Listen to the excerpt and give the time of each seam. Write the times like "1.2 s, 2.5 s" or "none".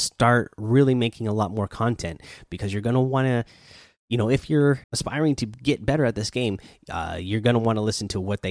4.8 s